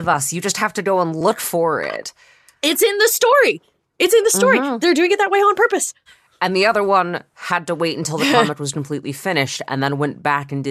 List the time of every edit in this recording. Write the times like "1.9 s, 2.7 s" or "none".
6.1 s